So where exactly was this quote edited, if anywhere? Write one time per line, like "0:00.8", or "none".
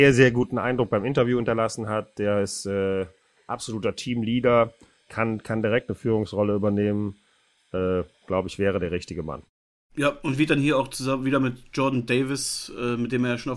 none